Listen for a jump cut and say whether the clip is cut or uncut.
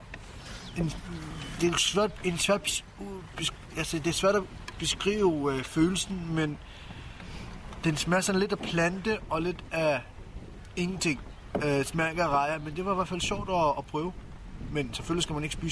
uncut